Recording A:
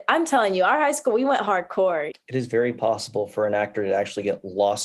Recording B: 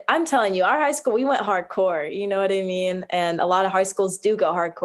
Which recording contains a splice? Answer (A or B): A